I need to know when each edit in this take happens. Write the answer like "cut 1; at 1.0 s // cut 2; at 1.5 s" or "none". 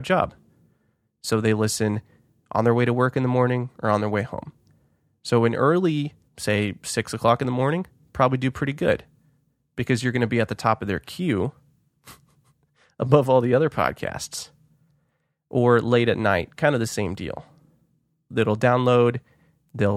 cut 1; at 6.3 s

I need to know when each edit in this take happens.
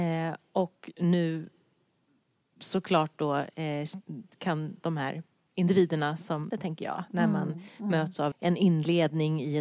cut 1; at 6.5 s // cut 2; at 8.3 s

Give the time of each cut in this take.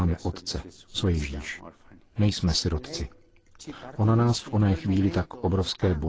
cut 1; at 0.9 s

